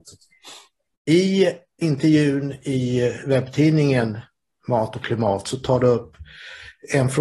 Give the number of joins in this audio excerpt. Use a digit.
1